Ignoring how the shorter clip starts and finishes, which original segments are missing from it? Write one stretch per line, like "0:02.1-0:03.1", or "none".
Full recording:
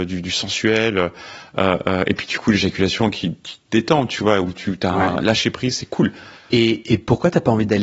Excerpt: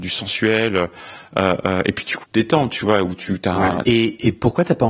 0:02.4-0:03.6
0:05.2-0:06.5